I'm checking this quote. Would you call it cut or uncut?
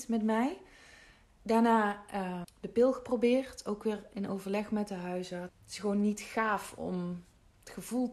cut